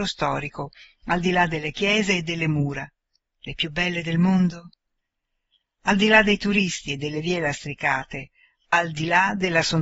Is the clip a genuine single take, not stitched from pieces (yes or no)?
yes